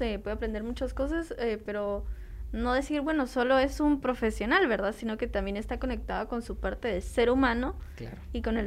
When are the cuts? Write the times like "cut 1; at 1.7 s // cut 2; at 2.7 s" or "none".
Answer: none